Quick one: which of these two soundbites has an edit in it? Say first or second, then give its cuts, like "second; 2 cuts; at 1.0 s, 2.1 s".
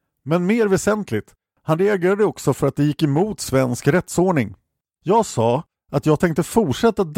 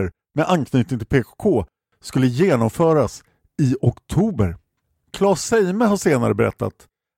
first; 1 cut; at 5.0 s